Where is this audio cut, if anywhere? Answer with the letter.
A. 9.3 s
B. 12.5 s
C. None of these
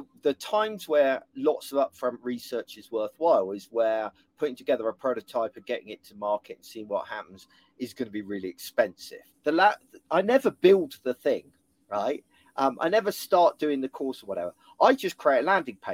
A